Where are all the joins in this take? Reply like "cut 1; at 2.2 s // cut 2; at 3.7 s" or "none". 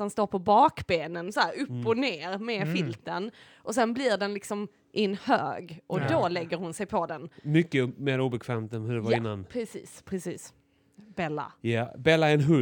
none